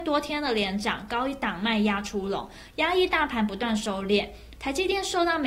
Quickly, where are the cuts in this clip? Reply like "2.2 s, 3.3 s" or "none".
4.6 s